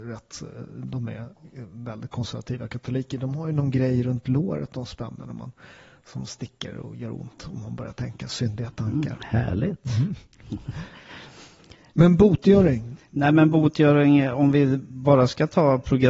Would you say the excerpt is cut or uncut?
uncut